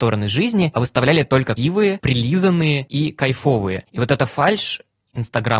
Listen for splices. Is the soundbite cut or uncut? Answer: cut